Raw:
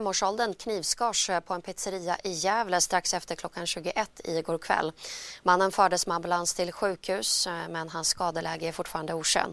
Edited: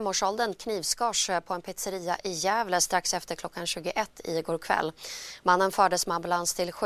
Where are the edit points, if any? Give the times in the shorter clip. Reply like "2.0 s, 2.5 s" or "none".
none